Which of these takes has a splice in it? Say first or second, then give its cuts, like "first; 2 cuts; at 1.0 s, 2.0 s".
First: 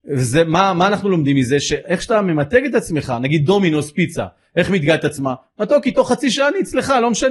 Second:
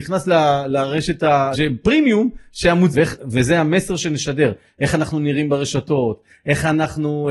second; 2 cuts; at 1.5 s, 2.9 s